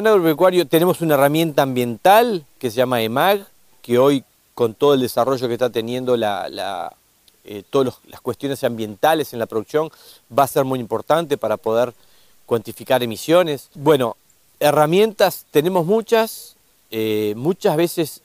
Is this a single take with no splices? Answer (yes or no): yes